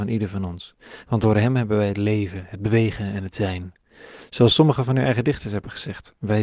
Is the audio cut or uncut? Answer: uncut